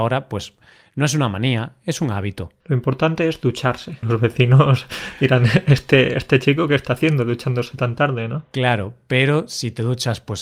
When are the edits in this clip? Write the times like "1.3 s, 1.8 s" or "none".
2.6 s, 4.0 s